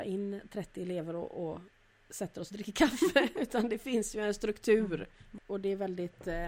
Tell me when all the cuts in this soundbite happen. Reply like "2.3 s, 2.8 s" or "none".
5.4 s